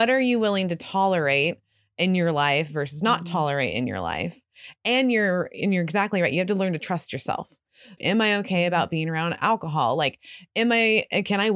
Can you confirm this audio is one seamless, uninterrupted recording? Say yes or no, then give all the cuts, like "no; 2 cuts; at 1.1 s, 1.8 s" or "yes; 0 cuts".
no; 1 cut; at 8.0 s